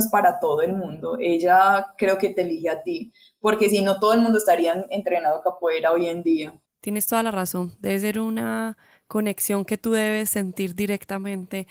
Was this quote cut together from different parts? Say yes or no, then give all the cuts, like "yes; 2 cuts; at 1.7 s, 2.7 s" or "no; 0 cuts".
no; 0 cuts